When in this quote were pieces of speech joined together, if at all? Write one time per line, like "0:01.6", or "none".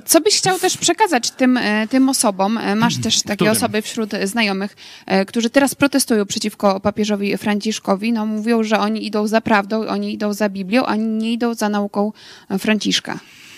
none